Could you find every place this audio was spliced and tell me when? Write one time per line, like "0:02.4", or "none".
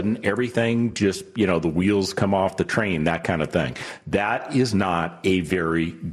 none